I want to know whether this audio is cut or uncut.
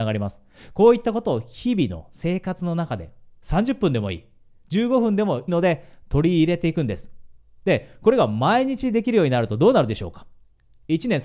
cut